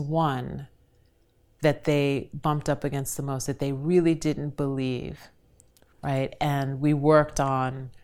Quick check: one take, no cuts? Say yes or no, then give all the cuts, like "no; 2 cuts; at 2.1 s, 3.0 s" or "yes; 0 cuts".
no; 1 cut; at 5.9 s